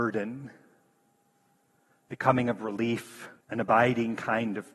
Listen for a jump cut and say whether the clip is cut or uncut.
cut